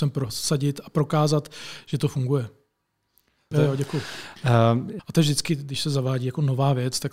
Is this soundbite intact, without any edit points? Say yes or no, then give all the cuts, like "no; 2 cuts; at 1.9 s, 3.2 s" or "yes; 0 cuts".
no; 2 cuts; at 3.5 s, 5.0 s